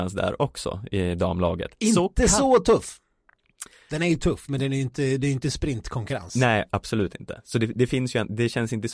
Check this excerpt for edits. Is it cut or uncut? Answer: uncut